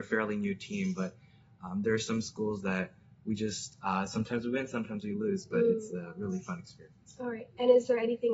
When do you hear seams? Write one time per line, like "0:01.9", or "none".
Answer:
none